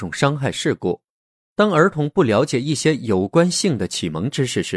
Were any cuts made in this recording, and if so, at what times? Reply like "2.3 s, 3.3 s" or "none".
none